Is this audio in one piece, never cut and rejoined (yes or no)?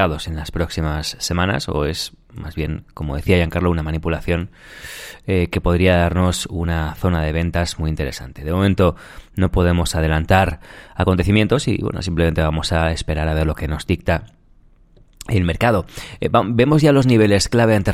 yes